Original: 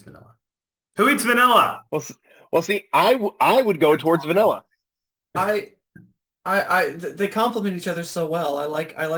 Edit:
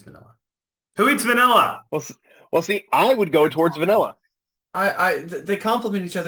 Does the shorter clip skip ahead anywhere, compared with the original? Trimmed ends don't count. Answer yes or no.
yes